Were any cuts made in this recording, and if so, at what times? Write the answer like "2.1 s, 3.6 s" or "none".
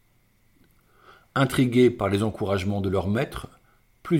none